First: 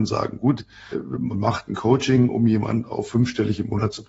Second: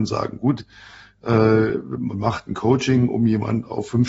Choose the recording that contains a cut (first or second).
first